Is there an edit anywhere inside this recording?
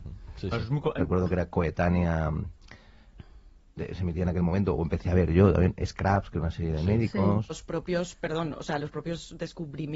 yes; 2 cuts; at 1.0 s, 7.5 s

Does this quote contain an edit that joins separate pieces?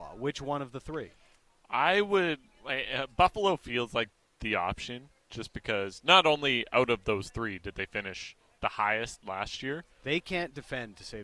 no; 0 cuts

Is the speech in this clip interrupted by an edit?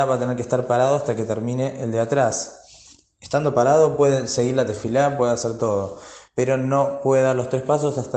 no; 0 cuts

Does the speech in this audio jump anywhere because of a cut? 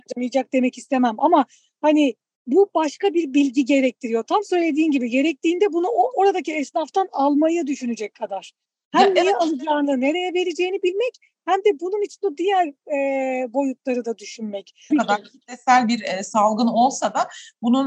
yes; 1 cut; at 14.9 s

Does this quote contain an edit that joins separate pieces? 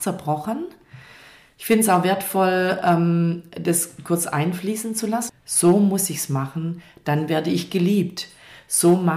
yes; 1 cut; at 5.3 s

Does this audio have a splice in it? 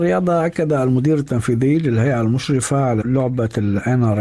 yes; 1 cut; at 3.0 s

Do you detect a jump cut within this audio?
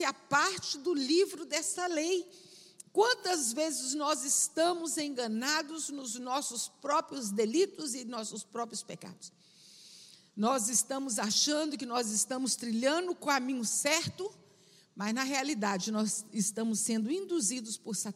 yes; 1 cut; at 2.8 s

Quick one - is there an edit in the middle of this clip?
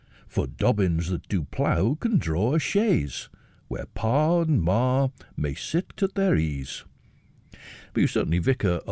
yes; 2 cuts; at 6.0 s, 7.9 s

